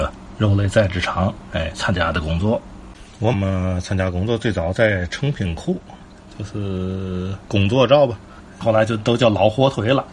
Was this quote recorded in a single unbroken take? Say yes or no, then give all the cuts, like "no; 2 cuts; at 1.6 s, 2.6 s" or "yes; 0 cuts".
no; 3 cuts; at 3.3 s, 6.3 s, 8.6 s